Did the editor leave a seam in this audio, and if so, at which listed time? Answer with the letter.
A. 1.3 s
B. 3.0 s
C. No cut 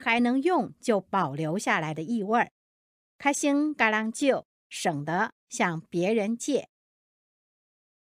B